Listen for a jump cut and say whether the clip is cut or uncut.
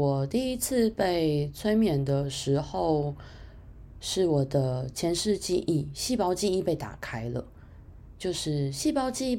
uncut